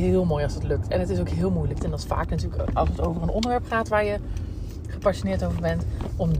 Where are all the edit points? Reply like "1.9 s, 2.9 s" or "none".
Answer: 1.8 s